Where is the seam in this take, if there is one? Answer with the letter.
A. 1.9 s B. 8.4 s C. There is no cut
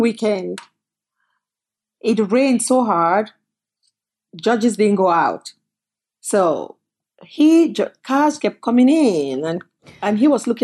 B